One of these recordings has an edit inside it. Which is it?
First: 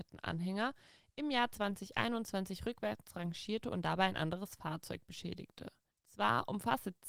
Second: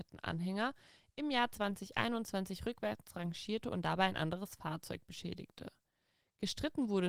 first; 1 cut; at 5.9 s

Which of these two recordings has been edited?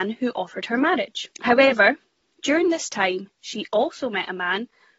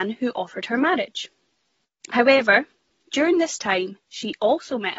first; 1 cut; at 1.3 s

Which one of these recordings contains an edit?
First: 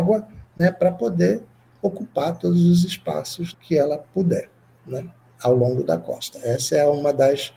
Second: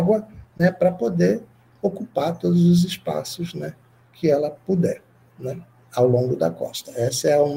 first; 1 cut; at 3.5 s

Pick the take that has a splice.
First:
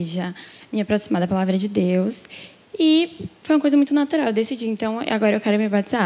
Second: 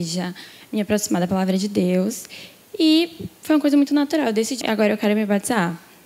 second; 1 cut; at 4.6 s

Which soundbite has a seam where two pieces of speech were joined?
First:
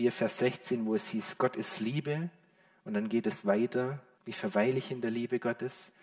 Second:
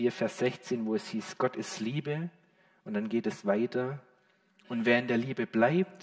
first; 1 cut; at 4.2 s

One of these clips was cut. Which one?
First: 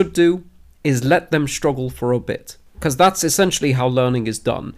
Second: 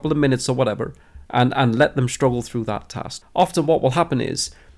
second; 2 cuts; at 1.3 s, 3.2 s

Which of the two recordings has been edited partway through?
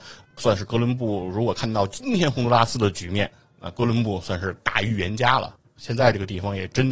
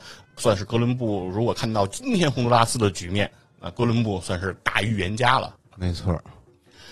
second; 1 cut; at 5.7 s

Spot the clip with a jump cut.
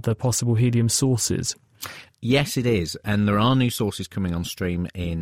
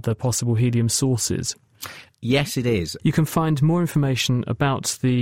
second; 1 cut; at 3.0 s

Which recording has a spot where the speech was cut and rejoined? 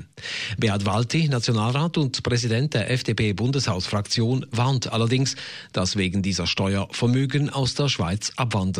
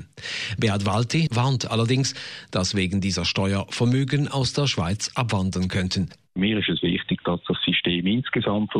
second; 1 cut; at 1.3 s

